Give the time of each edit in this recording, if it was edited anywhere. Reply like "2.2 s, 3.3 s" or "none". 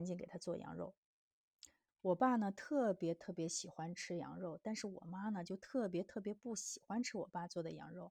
1.9 s